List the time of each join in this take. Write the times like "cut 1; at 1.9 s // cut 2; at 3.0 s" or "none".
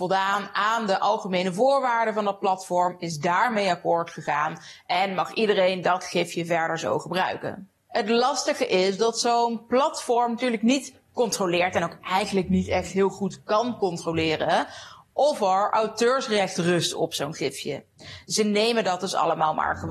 none